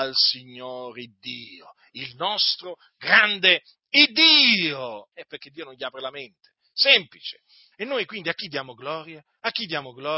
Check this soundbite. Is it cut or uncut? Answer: cut